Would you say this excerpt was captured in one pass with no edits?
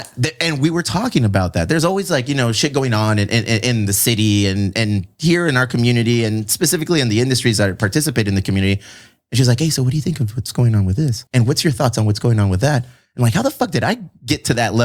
no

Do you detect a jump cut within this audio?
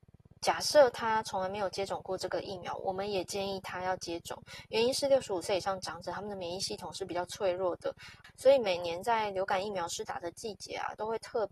no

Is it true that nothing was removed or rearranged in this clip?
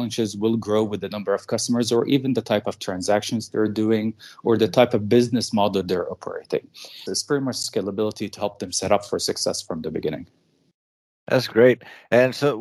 no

